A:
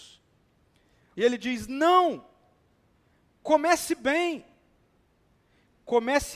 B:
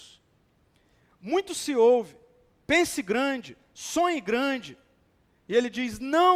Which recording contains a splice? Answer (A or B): A